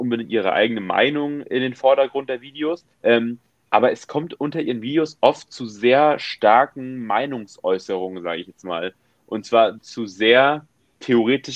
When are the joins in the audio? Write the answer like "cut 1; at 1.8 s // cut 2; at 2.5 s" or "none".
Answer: cut 1; at 2.9 s // cut 2; at 9.8 s